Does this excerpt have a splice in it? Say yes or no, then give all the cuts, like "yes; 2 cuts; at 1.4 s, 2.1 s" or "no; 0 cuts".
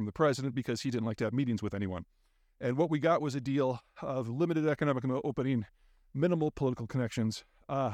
no; 0 cuts